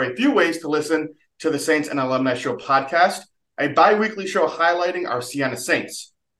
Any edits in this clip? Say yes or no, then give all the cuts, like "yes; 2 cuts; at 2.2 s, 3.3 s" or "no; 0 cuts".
no; 0 cuts